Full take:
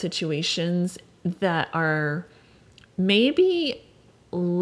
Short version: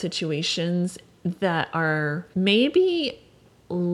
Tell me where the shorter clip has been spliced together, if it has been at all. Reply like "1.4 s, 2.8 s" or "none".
2.3 s